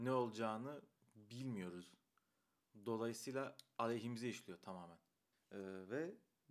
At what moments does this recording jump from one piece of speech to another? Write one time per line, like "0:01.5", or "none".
0:05.3